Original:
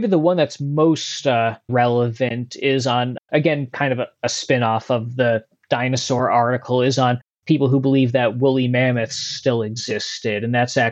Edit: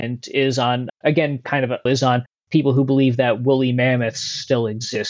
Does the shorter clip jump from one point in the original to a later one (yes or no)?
yes